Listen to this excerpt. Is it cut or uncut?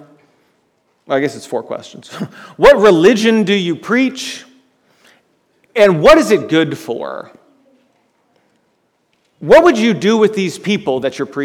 uncut